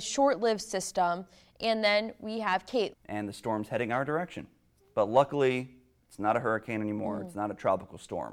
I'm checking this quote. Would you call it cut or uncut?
cut